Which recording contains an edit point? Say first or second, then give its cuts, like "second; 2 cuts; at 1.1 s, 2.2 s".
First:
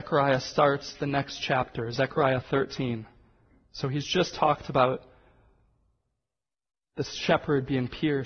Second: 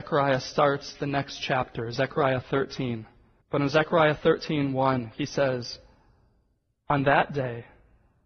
second; 1 cut; at 3.4 s